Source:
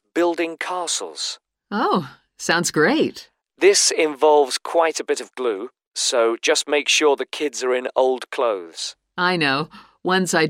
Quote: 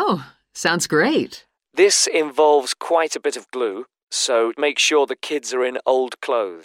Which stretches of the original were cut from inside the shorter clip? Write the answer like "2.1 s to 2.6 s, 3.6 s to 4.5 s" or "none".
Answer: 6.4 s to 6.6 s

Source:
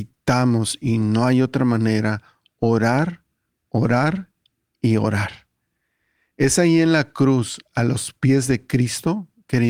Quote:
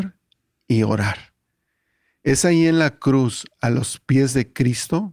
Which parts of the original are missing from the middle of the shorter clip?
none

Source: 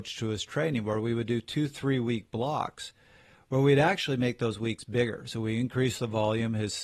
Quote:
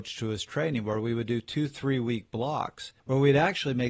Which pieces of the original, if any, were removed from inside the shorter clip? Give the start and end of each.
3.0 s to 3.4 s

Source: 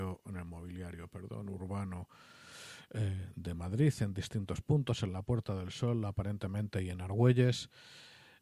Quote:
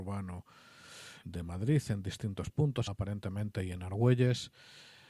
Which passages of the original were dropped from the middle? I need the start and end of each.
2.9 s to 3.3 s, 5.0 s to 6.1 s

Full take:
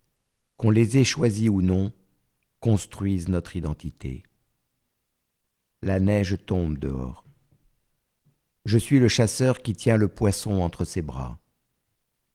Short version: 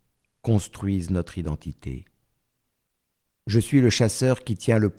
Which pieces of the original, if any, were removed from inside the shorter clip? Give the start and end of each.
5.6 s to 8.6 s

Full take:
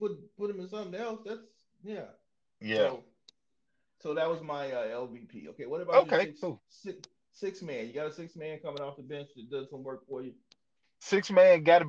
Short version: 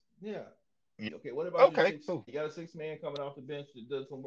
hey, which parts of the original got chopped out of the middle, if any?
2.7 s to 5.4 s, 6.6 s to 7.9 s

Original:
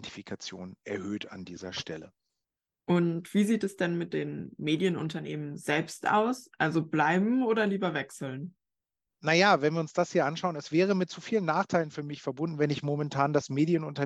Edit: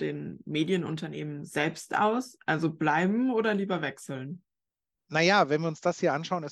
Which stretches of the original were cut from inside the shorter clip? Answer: none

